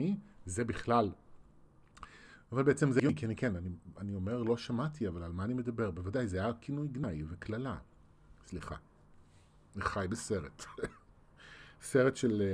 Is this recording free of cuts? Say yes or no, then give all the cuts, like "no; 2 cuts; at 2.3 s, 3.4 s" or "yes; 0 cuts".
yes; 0 cuts